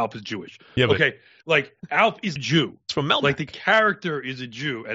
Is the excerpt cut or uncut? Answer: cut